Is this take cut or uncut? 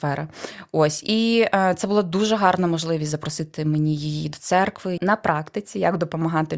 cut